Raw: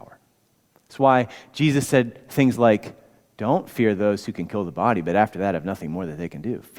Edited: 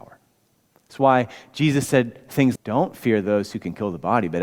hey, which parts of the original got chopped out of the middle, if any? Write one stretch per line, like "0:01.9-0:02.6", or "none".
0:02.6-0:03.3